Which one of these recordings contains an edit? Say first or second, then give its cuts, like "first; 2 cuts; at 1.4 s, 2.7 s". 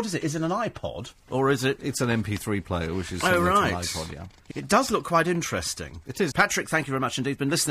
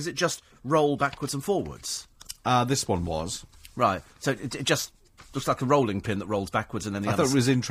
first; 2 cuts; at 4.5 s, 6.3 s